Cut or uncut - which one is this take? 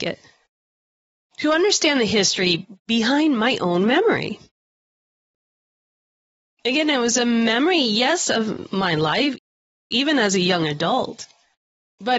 uncut